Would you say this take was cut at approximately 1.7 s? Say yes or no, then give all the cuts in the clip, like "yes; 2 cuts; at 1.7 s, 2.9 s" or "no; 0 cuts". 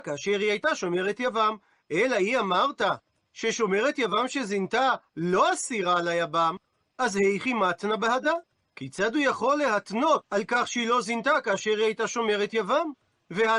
no; 1 cut; at 10.2 s